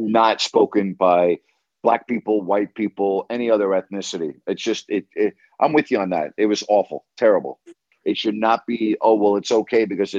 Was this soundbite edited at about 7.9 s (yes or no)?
yes